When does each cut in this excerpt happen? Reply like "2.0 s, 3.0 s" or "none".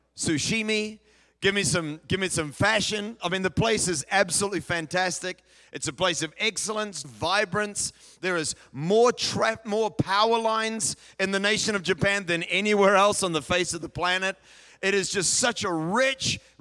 7.0 s